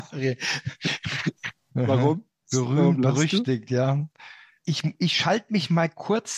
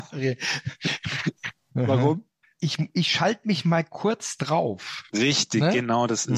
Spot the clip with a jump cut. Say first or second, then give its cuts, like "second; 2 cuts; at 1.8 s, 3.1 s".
second; 1 cut; at 2.4 s